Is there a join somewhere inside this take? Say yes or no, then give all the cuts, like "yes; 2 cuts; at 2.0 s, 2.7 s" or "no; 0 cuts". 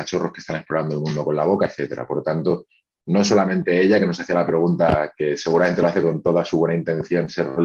no; 0 cuts